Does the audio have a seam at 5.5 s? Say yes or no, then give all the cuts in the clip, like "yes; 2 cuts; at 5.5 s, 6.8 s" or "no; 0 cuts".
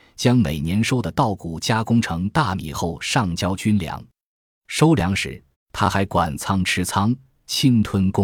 yes; 1 cut; at 5.5 s